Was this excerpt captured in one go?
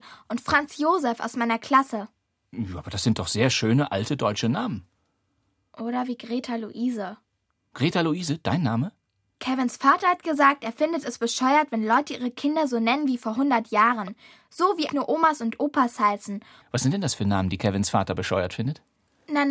no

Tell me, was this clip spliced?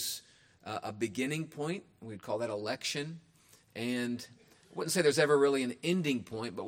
no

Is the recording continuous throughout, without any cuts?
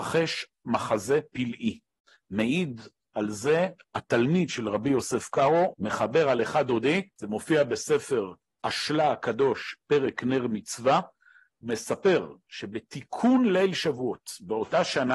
no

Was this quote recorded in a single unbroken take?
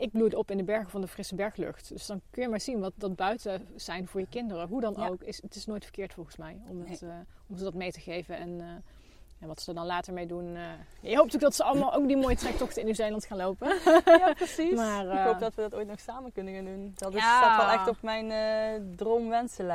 yes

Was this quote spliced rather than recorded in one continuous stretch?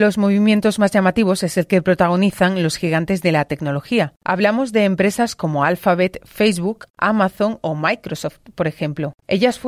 yes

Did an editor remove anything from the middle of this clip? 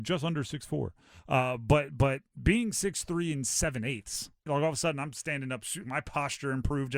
yes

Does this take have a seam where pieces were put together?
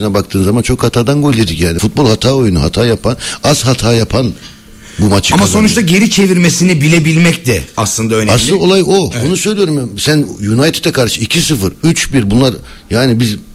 yes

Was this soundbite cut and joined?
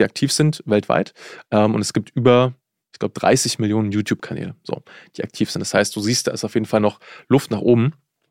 no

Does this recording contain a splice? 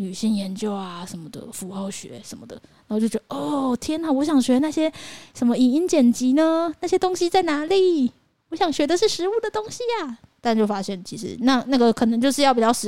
no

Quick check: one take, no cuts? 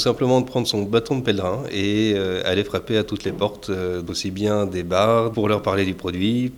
no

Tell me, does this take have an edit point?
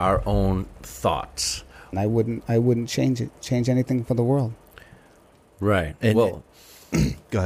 yes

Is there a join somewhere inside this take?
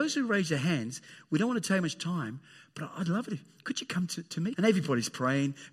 yes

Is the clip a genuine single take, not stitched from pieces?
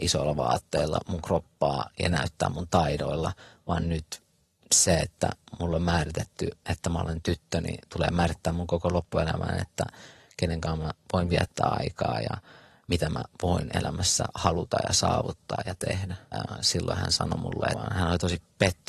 no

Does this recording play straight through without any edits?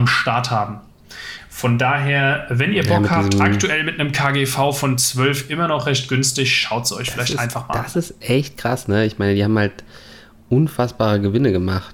yes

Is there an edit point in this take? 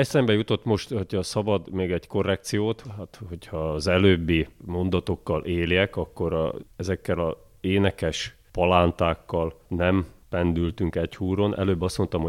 no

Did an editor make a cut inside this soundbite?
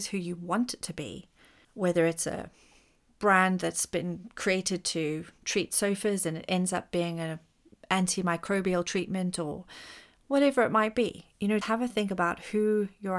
yes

